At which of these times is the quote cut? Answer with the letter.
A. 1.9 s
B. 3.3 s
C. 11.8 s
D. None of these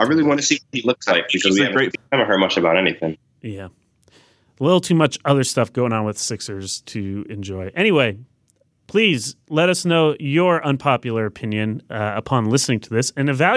A